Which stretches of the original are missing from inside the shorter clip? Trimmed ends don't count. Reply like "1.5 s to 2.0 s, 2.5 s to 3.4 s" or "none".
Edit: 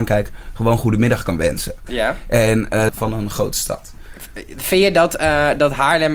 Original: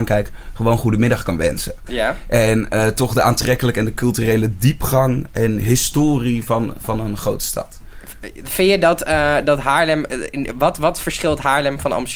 2.9 s to 6.8 s